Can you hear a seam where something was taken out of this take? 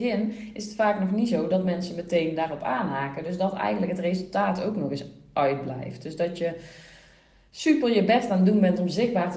no; 0 cuts

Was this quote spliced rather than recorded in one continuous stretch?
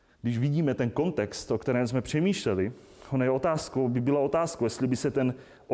no; 0 cuts

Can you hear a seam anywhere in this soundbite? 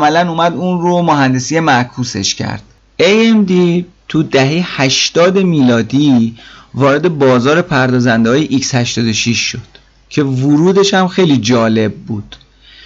no; 0 cuts

